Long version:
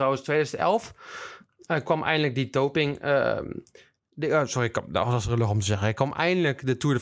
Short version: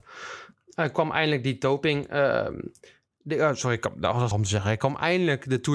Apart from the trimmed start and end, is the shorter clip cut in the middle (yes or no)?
yes